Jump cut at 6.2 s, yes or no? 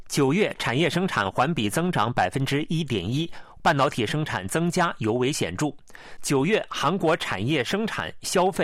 yes